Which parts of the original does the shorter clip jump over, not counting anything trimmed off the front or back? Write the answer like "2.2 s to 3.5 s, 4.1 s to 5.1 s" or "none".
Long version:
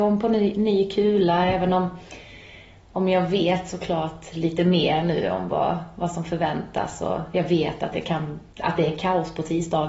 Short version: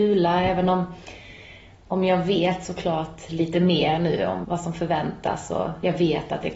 5.5 s to 6.0 s